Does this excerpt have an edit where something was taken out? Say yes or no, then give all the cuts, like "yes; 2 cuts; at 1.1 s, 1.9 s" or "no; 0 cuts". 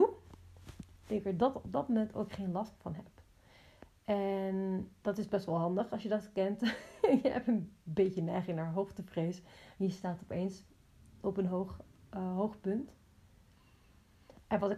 no; 0 cuts